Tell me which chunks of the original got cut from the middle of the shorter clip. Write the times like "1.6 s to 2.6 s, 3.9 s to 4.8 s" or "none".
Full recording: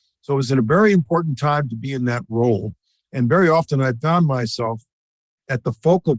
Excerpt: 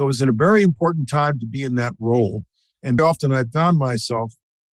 3.3 s to 3.5 s